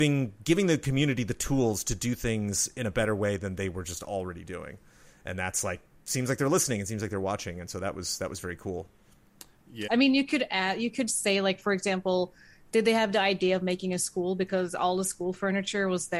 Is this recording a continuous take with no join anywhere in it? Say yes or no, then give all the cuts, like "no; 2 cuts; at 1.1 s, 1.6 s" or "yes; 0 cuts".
no; 1 cut; at 9.9 s